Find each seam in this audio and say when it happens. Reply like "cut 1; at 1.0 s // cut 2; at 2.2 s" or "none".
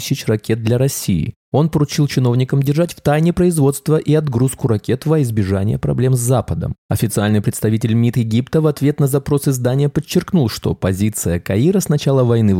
none